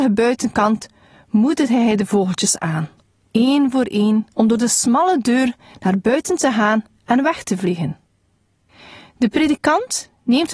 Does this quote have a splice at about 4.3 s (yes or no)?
yes